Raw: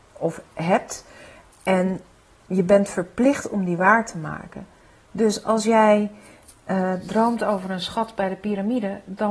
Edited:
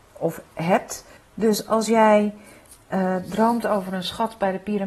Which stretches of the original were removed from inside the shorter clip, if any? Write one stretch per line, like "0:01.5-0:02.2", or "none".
0:01.2-0:04.9